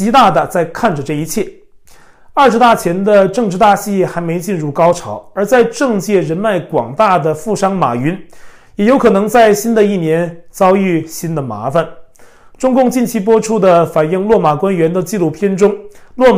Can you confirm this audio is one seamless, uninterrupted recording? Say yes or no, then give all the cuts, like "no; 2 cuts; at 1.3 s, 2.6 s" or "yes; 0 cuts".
yes; 0 cuts